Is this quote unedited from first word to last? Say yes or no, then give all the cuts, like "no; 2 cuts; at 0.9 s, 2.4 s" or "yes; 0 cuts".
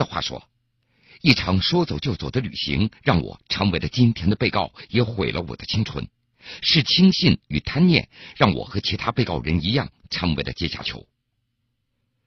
yes; 0 cuts